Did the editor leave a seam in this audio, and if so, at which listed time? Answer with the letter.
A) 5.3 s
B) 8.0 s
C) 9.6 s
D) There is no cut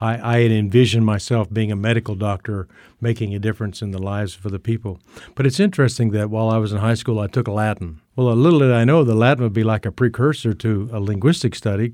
B